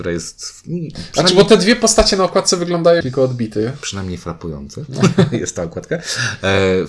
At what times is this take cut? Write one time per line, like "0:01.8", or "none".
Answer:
0:03.0